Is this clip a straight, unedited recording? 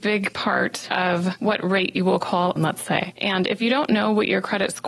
no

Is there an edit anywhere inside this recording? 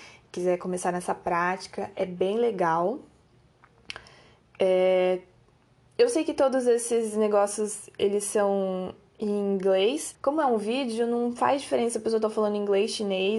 yes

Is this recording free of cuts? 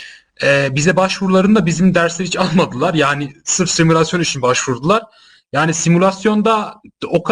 yes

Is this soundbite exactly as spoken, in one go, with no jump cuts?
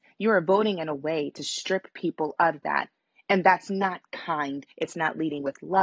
no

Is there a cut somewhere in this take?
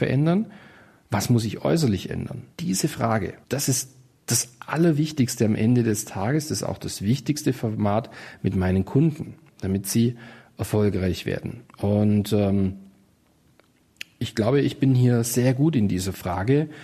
no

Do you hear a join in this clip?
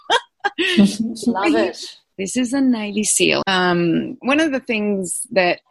yes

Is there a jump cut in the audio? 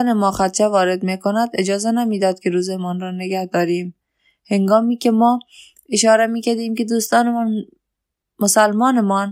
no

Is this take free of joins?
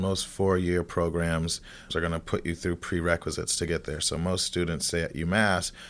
no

